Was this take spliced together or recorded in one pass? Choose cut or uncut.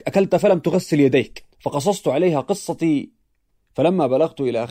cut